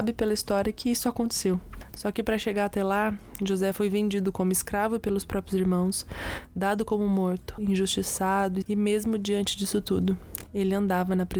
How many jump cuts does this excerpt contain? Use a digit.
2